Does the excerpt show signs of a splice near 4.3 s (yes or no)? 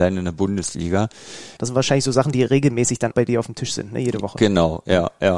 no